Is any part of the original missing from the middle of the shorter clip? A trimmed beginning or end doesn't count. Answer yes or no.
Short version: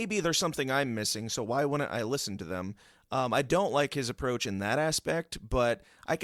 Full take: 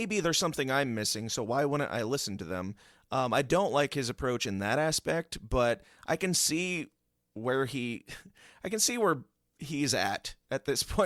no